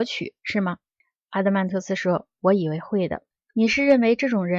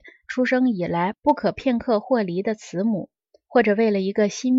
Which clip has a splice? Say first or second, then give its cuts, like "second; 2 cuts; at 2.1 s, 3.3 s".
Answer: first; 1 cut; at 3.3 s